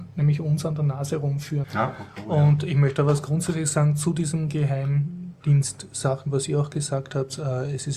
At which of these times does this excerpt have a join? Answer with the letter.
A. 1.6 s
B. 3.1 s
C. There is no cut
A